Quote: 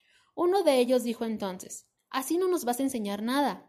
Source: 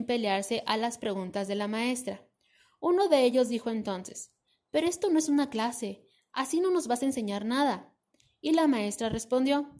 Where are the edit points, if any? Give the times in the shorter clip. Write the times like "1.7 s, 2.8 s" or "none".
2.0 s